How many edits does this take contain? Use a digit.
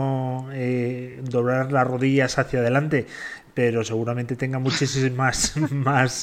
0